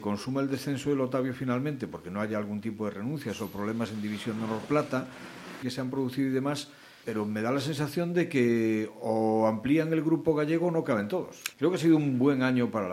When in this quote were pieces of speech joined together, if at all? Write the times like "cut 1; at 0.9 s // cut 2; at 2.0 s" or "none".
cut 1; at 5.6 s // cut 2; at 7.0 s // cut 3; at 11.5 s